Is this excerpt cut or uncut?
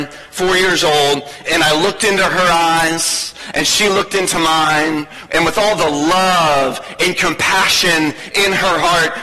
uncut